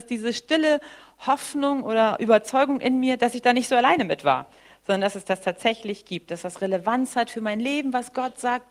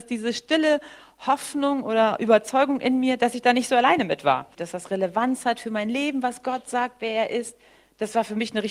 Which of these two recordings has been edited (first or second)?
second